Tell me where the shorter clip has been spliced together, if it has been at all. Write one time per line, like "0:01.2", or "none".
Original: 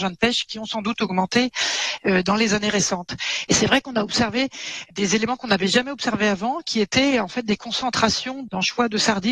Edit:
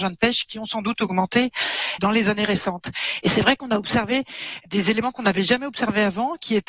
0:02.0